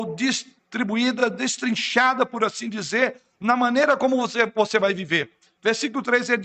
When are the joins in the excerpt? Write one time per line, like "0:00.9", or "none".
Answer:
none